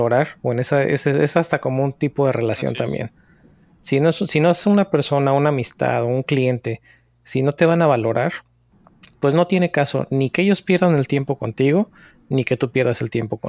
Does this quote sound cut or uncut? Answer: uncut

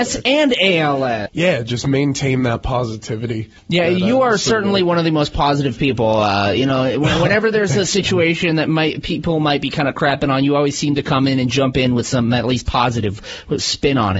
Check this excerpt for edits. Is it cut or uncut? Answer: cut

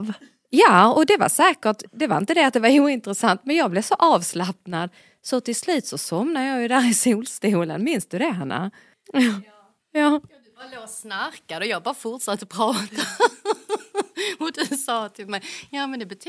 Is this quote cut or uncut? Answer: uncut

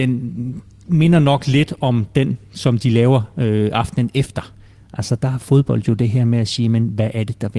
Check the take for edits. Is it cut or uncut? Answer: uncut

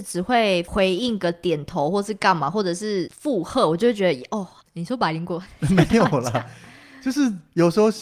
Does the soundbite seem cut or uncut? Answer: cut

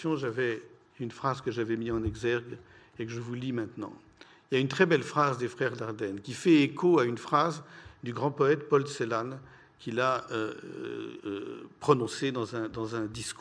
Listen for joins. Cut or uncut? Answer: uncut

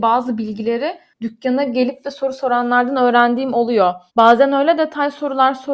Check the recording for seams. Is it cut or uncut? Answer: cut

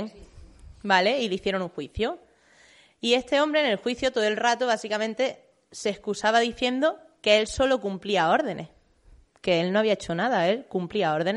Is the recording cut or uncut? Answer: uncut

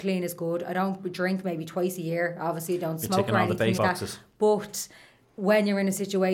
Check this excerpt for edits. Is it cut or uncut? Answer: cut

